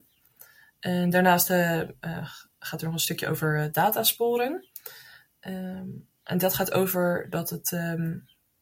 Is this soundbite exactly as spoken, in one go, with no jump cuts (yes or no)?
yes